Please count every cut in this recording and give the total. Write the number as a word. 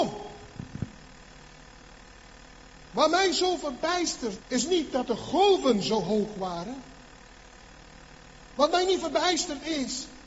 one